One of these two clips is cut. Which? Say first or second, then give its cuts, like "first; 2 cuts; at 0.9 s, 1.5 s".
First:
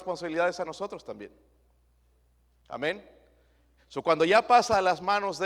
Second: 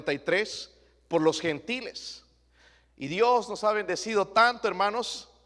first; 1 cut; at 3.8 s